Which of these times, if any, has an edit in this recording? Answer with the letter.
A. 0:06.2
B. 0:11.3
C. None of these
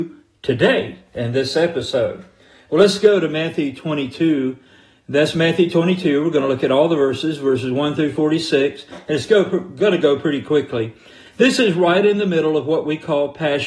B